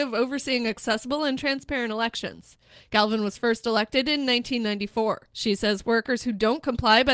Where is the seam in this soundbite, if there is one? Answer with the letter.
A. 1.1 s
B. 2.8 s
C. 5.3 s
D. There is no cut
C